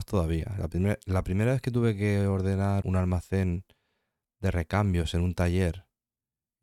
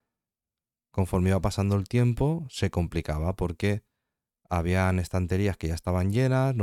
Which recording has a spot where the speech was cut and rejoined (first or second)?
first